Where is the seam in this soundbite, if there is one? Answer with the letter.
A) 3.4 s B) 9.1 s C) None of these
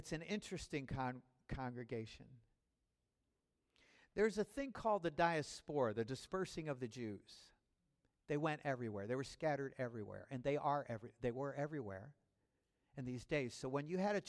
C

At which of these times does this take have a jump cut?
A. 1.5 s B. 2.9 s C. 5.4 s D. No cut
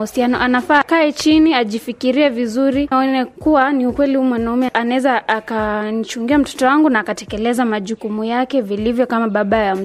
B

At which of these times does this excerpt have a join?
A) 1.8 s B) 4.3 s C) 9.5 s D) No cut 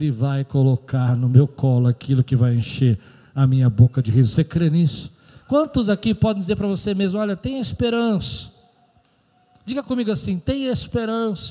D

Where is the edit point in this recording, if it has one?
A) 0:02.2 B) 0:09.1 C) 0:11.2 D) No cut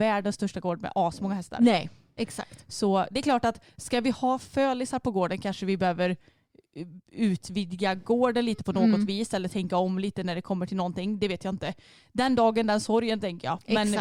A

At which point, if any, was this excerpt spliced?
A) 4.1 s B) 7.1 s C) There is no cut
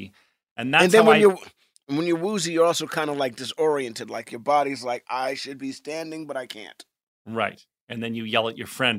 C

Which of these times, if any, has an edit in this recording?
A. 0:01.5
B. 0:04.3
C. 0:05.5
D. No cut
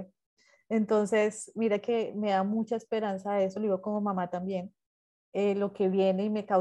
D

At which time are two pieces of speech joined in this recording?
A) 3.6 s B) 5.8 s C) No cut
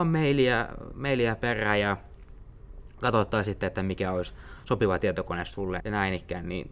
B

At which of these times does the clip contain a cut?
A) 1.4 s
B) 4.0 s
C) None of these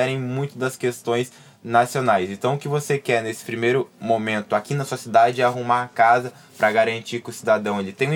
C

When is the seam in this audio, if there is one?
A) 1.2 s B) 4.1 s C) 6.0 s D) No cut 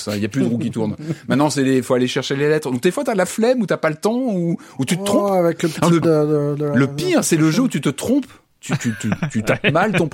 C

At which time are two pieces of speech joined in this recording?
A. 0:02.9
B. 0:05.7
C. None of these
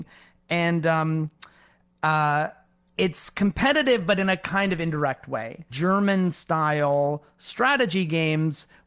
B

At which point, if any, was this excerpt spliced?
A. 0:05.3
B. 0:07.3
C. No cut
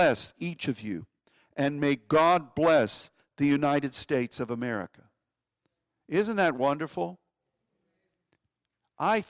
C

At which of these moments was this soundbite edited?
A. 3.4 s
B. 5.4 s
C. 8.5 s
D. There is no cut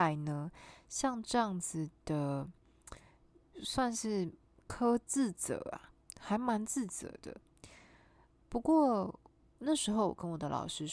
D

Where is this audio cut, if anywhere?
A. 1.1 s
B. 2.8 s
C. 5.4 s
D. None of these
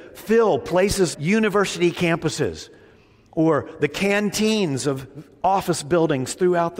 A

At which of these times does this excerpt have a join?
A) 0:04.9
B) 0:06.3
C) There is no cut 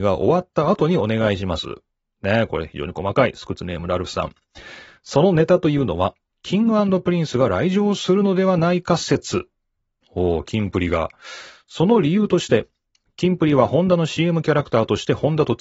B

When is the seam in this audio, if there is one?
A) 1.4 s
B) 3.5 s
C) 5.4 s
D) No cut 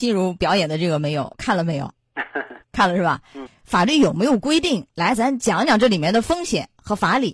B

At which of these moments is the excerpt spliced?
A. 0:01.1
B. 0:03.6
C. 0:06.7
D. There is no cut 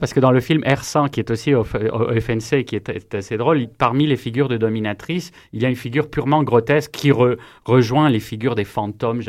B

